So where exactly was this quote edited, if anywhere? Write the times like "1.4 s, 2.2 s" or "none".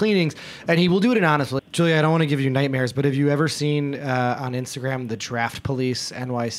1.6 s